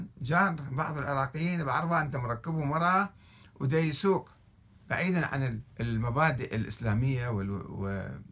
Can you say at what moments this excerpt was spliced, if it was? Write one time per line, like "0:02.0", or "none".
0:05.7

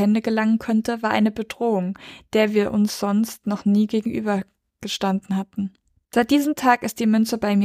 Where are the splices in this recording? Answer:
none

